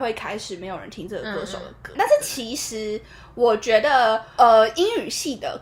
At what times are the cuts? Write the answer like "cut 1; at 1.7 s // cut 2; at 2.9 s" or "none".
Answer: cut 1; at 2.0 s